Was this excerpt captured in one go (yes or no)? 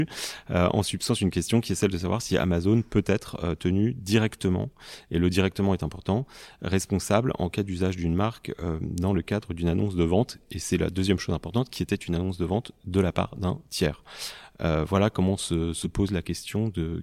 yes